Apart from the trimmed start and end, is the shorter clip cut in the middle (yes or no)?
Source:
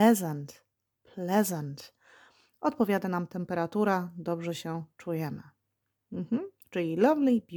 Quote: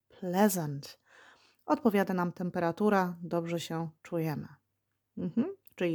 no